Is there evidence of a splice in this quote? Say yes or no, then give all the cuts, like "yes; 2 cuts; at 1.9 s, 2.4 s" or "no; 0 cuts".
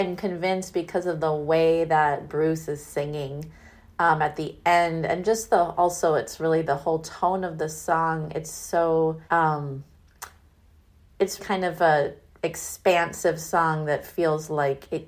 yes; 2 cuts; at 9.2 s, 11.4 s